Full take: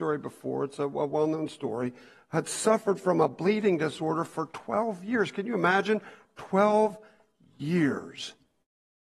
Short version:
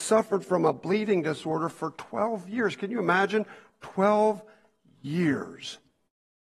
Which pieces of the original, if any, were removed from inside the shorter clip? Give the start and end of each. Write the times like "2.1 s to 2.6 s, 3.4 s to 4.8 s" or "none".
none